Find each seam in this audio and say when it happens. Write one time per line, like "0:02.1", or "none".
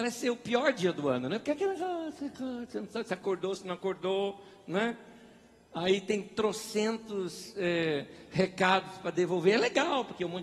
none